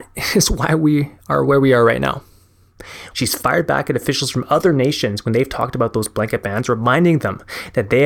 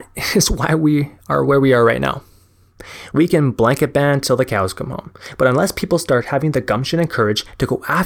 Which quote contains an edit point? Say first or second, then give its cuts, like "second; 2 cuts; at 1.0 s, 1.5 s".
first; 1 cut; at 3.1 s